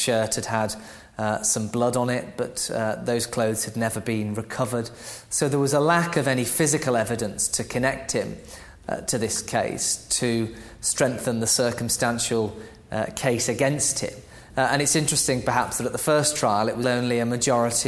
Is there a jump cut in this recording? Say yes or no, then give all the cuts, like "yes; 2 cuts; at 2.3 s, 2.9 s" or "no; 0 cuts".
yes; 2 cuts; at 14.5 s, 16.8 s